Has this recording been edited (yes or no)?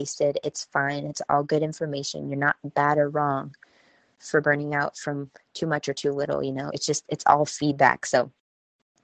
no